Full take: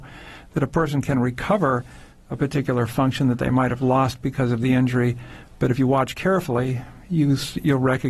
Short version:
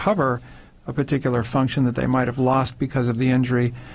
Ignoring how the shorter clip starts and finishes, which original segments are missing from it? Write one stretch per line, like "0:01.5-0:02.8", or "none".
none